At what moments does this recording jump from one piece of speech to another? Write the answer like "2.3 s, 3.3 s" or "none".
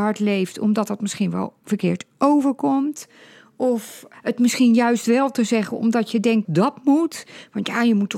6.4 s